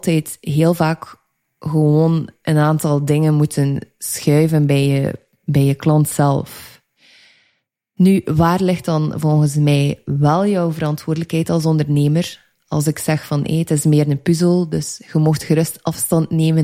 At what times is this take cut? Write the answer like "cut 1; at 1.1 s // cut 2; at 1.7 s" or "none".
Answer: none